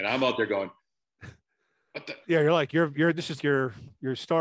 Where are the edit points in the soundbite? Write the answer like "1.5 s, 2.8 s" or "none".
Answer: 2.2 s, 3.4 s